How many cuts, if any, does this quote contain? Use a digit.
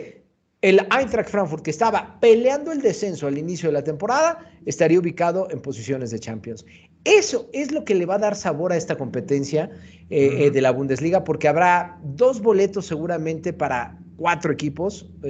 0